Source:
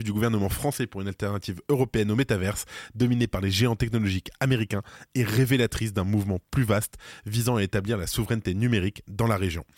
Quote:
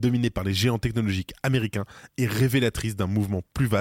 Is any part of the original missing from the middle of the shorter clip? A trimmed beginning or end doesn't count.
no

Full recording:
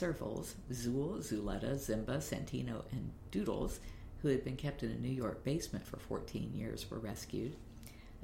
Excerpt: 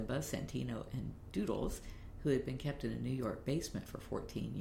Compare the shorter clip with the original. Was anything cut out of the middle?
no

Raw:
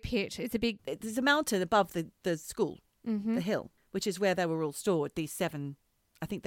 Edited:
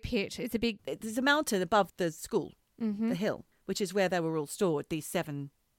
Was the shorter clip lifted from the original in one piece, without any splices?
no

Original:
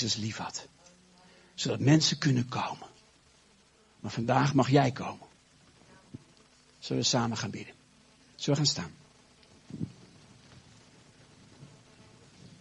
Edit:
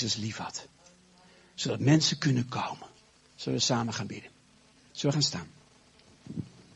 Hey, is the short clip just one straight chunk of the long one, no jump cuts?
no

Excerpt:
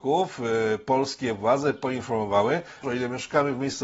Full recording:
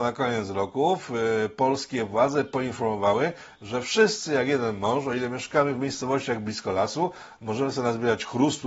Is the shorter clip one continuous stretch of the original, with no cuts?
no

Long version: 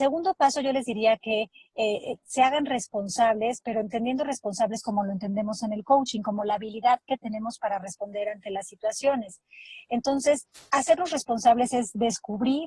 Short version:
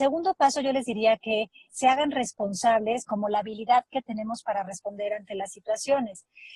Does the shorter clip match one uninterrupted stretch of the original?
no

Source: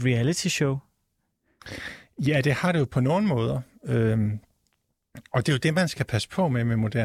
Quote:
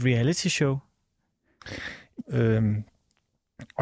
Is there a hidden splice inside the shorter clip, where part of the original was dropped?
yes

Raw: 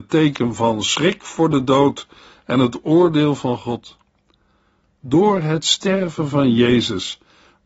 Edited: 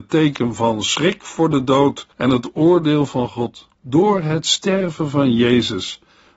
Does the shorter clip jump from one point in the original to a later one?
yes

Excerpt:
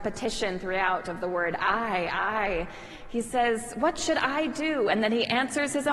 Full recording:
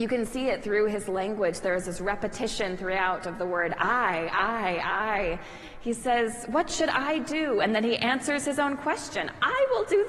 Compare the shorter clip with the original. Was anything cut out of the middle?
yes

